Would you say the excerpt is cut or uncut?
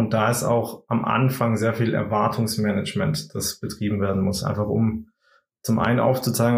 uncut